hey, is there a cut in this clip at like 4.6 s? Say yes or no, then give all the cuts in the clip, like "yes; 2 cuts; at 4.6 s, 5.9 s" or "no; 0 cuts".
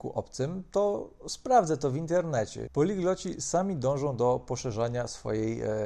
no; 1 cut; at 2.7 s